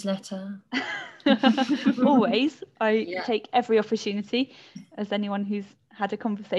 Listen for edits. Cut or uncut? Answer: uncut